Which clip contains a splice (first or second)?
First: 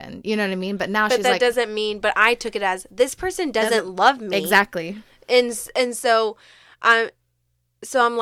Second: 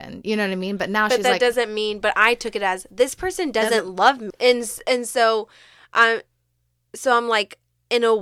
second